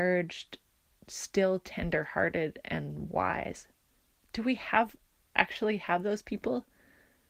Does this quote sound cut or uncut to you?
uncut